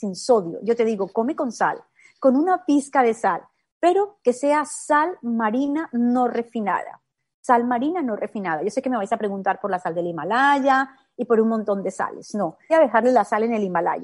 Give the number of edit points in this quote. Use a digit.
1